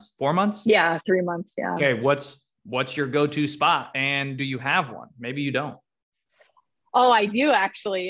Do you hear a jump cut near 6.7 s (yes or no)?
no